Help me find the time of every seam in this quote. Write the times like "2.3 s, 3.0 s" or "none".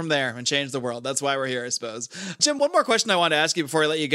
none